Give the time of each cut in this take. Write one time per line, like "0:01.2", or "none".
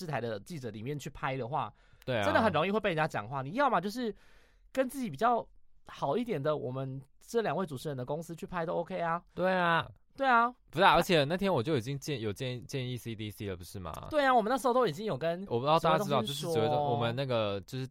0:15.5